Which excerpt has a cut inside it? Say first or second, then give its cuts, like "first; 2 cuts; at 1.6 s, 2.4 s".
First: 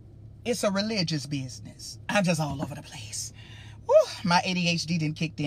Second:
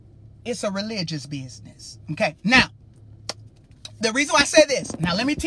first; 1 cut; at 2.0 s